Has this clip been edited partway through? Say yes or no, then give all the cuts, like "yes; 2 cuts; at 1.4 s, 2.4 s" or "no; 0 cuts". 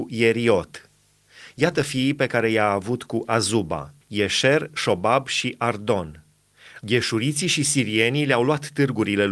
yes; 2 cuts; at 4.0 s, 6.8 s